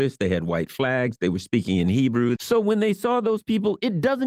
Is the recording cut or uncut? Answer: cut